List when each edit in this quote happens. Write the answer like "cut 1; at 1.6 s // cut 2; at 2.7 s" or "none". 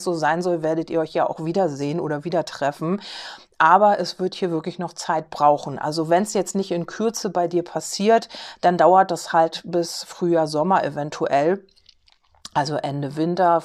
none